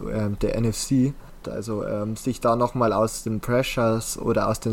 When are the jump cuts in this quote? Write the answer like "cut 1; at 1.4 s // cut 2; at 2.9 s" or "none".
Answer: cut 1; at 1.4 s